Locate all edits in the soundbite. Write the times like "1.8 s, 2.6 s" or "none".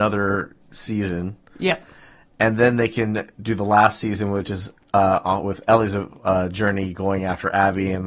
none